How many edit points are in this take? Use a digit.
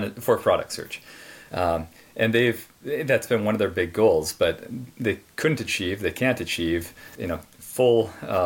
2